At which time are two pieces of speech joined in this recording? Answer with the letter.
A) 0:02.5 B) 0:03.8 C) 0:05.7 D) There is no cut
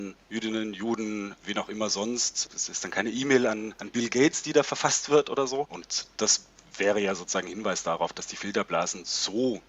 C